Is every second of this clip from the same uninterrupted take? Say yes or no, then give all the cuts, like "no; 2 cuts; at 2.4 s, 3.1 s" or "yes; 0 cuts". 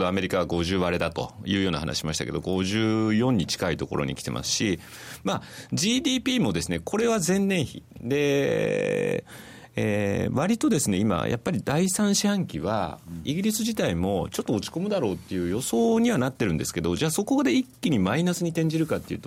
yes; 0 cuts